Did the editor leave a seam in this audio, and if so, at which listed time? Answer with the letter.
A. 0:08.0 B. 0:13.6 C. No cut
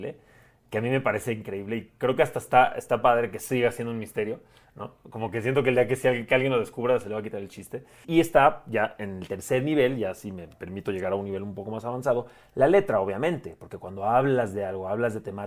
A